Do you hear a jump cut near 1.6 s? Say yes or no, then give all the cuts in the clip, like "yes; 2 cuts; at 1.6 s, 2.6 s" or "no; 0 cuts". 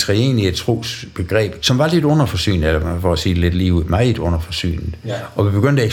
yes; 1 cut; at 1.6 s